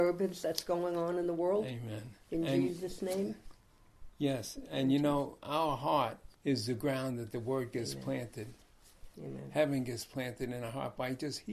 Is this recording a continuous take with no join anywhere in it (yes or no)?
no